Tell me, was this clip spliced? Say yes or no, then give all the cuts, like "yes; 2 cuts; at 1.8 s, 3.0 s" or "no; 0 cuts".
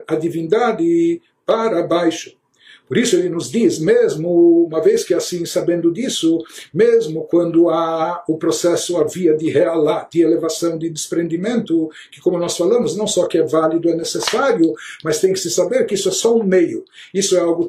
no; 0 cuts